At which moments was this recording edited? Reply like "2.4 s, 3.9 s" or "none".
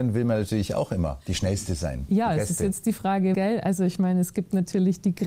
3.3 s